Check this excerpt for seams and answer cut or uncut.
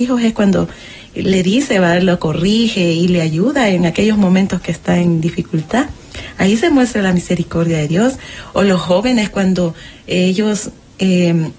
uncut